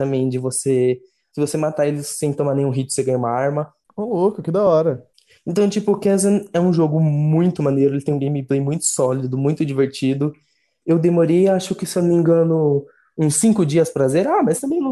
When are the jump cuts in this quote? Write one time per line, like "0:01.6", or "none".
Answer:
none